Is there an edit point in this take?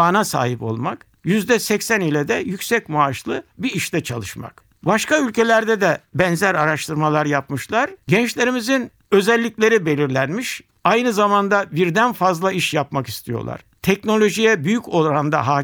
yes; 2 cuts; at 8.0 s, 10.8 s

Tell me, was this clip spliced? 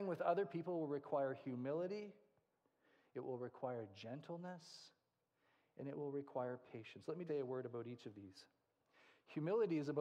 yes; 1 cut; at 7.3 s

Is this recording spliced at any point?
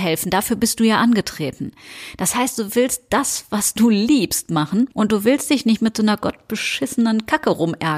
yes; 1 cut; at 4.9 s

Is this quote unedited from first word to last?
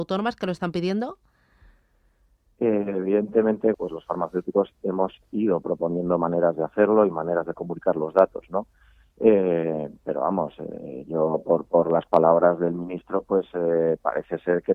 no; 1 cut; at 3.7 s

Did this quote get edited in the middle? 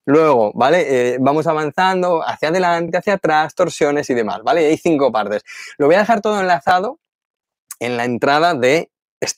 no; 0 cuts

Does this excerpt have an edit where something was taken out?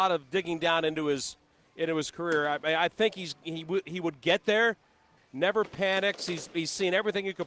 yes; 1 cut; at 5.2 s

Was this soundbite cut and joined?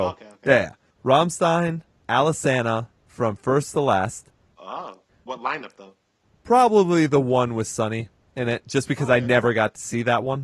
no; 0 cuts

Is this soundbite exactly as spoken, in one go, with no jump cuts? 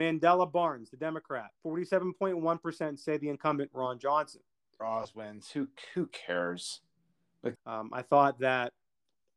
no; 3 cuts; at 1.5 s, 4.8 s, 7.5 s

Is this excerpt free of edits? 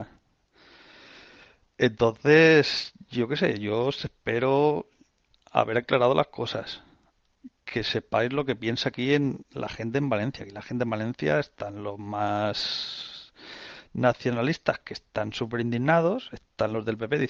yes; 0 cuts

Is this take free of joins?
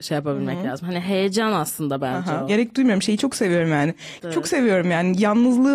no; 2 cuts; at 2.5 s, 4.2 s

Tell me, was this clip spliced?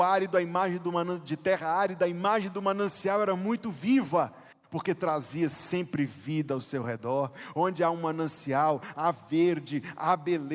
no; 0 cuts

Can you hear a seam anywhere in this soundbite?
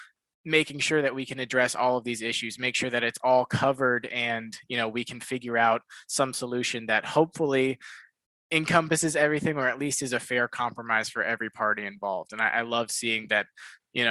no; 0 cuts

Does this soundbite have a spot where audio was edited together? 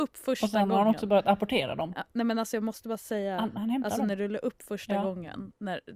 no; 0 cuts

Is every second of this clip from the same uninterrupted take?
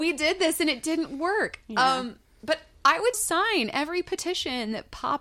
no; 1 cut; at 3.1 s

